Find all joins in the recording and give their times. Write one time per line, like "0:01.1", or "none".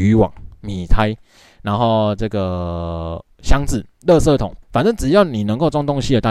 0:04.6